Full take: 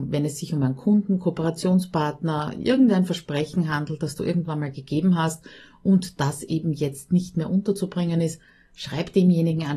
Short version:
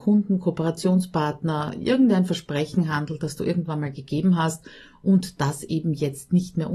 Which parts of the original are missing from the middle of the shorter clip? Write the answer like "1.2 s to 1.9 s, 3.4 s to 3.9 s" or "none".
none